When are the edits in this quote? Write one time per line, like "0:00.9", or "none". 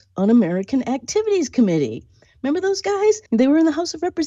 0:03.3